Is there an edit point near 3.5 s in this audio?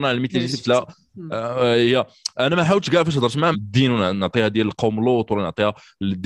yes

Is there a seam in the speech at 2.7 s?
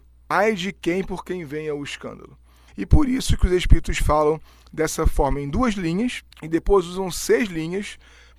yes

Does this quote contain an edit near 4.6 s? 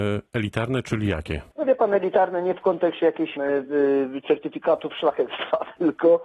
no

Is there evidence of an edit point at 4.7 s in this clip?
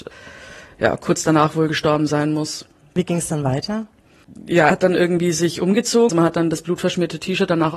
yes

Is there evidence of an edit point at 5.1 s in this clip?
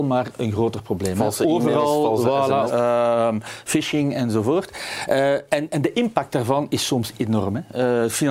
no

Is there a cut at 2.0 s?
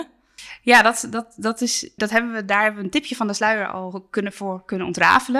yes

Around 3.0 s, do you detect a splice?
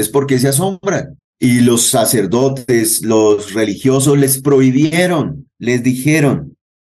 no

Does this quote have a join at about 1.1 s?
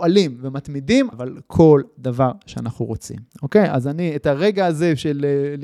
yes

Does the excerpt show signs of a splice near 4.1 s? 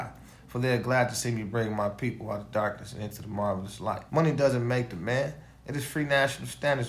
yes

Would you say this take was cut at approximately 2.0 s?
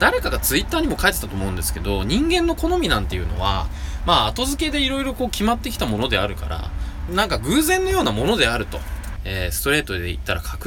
no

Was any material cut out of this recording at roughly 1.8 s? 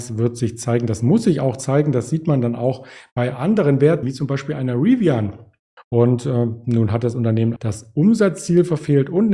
no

